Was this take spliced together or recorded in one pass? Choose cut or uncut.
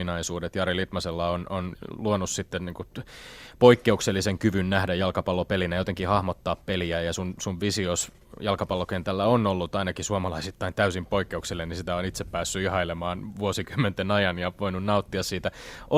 uncut